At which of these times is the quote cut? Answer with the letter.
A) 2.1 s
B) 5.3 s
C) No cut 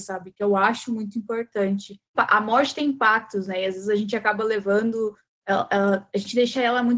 A